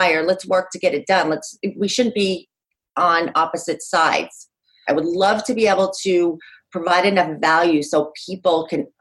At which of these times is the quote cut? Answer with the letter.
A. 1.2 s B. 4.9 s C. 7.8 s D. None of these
B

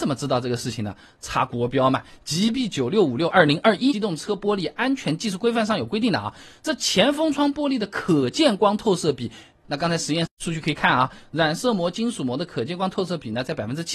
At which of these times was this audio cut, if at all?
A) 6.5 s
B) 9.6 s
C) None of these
B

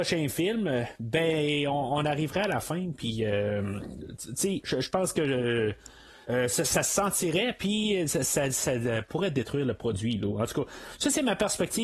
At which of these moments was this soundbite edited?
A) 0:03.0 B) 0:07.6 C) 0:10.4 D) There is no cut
D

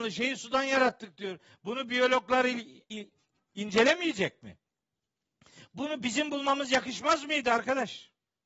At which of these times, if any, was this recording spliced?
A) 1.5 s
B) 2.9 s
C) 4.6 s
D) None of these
B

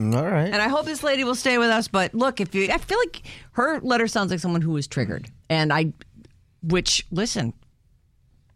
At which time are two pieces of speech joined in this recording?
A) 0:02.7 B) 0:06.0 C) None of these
A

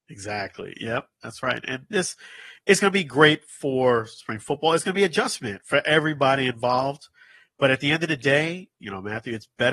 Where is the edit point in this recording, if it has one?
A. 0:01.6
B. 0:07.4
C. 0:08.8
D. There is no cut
C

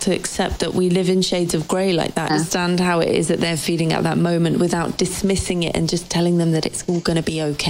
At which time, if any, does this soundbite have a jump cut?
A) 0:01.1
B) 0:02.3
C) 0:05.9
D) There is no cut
B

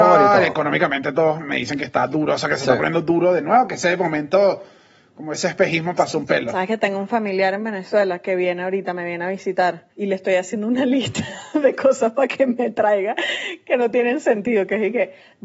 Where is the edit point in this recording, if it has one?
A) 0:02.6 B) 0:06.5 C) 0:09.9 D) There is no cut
C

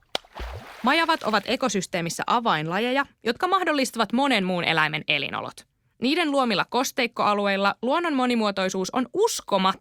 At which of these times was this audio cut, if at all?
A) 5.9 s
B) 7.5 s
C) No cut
C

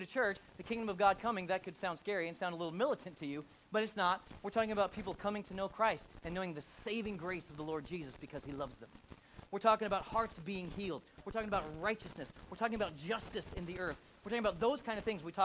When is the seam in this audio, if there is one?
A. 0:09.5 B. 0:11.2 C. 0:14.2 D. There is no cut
A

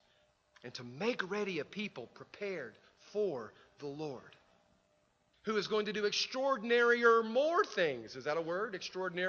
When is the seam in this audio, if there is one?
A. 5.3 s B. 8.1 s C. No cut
A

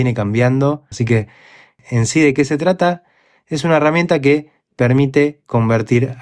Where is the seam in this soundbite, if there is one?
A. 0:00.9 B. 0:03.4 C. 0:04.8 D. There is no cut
A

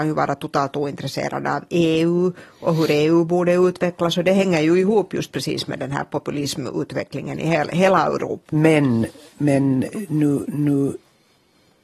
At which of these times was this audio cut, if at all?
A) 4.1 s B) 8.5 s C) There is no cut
B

